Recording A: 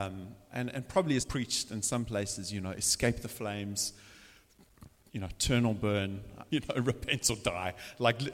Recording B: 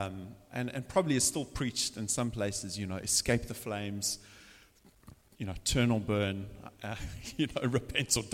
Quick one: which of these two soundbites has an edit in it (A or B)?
A